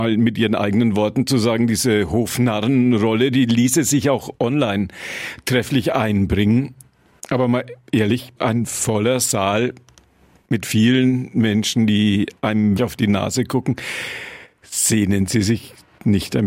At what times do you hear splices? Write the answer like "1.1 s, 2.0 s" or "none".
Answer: 8.4 s, 12.8 s